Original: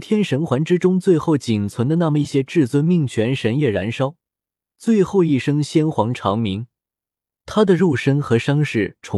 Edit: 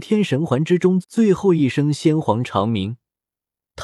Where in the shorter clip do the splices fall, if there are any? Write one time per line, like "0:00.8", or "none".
0:01.0